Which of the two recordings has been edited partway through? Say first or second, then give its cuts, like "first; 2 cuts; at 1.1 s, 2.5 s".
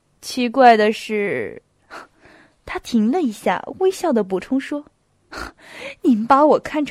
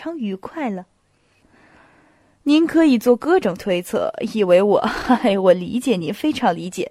second; 1 cut; at 1.4 s